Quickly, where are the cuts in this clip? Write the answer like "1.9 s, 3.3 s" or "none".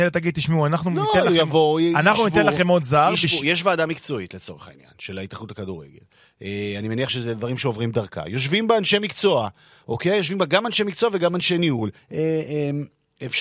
12.0 s